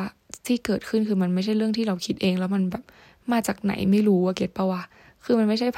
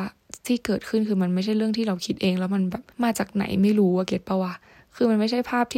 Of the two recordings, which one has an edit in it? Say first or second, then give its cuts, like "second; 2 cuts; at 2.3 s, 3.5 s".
second; 1 cut; at 2.9 s